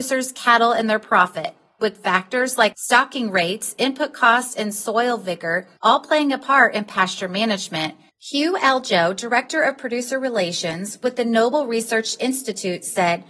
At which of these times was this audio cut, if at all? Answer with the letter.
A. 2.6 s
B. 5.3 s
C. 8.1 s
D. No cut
C